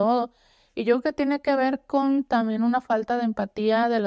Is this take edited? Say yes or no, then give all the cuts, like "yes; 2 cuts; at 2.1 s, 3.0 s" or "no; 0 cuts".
no; 0 cuts